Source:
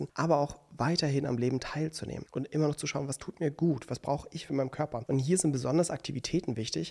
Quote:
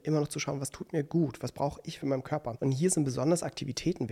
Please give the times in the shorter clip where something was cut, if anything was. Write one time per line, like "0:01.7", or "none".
none